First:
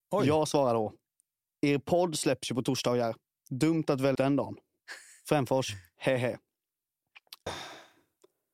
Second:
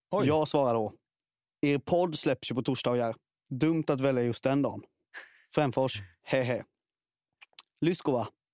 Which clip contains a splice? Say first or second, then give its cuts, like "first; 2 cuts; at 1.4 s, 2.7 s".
first; 2 cuts; at 4.1 s, 7.5 s